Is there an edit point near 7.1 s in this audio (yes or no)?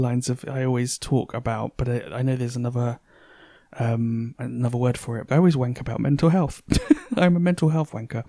no